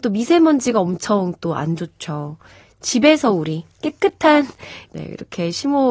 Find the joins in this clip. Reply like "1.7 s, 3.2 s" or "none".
4.9 s

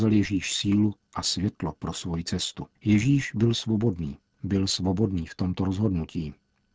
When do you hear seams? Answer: 2.8 s

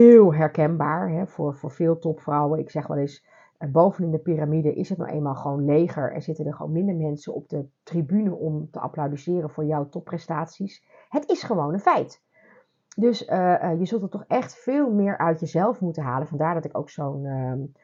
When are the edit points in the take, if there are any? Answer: none

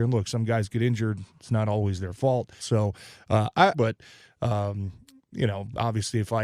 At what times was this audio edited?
2.6 s, 3.7 s

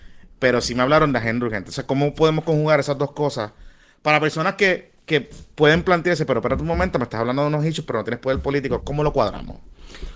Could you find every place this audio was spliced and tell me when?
8.8 s

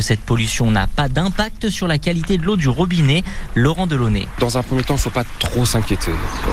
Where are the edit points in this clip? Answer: none

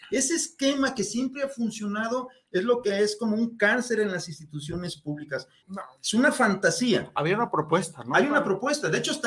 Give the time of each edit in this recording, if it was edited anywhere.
5.6 s

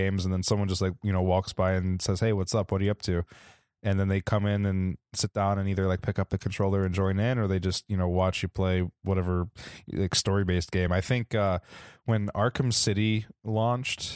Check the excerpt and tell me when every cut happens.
none

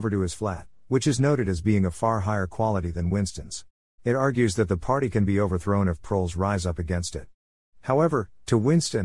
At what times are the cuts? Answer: 4.0 s

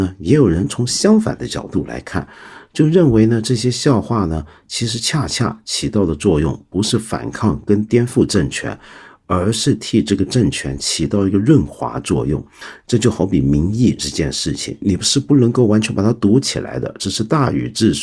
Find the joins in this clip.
none

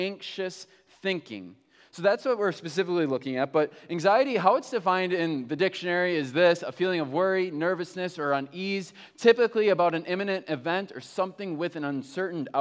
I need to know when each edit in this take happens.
none

